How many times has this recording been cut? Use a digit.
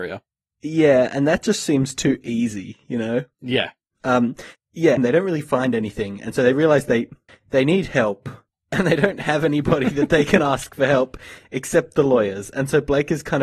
1